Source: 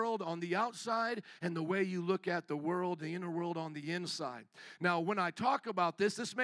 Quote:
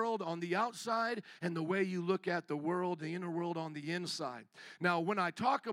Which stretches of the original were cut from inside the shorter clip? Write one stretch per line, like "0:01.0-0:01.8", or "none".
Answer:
none